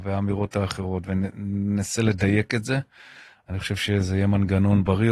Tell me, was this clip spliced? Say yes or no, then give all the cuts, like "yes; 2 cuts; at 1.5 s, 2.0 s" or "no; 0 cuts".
no; 0 cuts